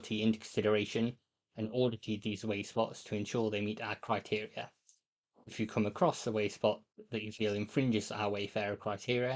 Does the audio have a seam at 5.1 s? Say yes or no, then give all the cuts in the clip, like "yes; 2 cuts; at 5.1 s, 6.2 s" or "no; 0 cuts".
no; 0 cuts